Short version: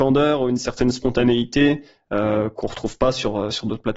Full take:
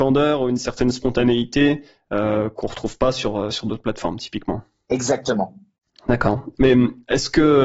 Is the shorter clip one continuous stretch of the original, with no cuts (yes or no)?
yes